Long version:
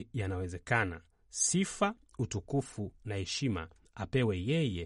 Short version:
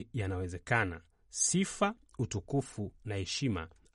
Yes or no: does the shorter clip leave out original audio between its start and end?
no